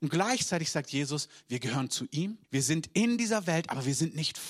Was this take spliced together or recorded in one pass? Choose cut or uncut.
cut